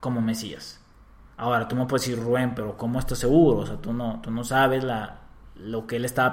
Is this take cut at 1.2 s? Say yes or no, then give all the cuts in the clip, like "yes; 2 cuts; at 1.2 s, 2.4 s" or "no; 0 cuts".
no; 0 cuts